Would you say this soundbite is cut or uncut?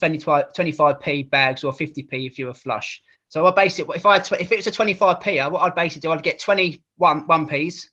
cut